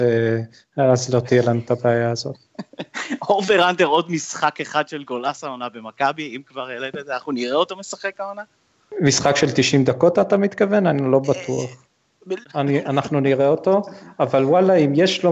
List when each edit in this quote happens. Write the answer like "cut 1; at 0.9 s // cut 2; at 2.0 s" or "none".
cut 1; at 12.4 s